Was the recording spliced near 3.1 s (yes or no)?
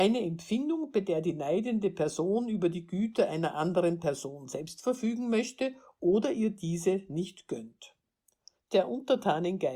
no